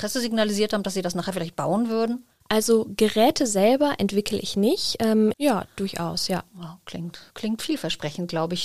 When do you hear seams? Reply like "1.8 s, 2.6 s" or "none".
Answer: 2.4 s, 5.3 s